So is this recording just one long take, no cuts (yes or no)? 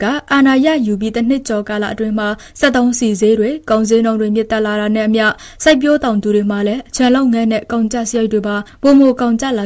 yes